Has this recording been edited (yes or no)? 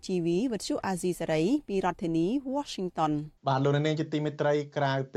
yes